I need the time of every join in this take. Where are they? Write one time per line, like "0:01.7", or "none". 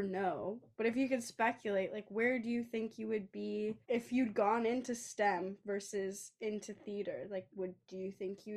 0:03.8